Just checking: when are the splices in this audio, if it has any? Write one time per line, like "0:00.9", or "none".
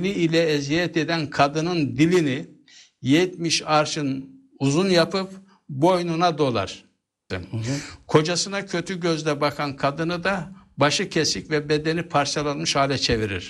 0:07.3